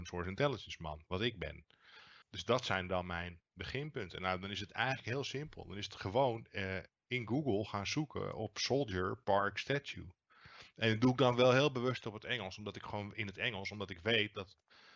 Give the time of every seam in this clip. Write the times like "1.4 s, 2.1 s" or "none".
2.2 s